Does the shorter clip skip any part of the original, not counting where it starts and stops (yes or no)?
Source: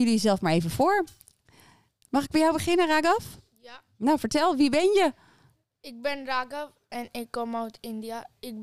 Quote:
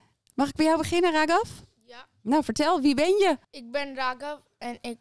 yes